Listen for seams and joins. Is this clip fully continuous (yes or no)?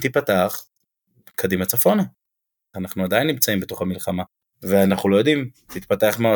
no